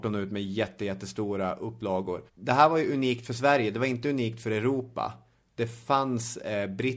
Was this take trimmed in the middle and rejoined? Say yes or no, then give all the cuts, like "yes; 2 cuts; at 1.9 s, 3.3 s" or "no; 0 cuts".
yes; 1 cut; at 2.3 s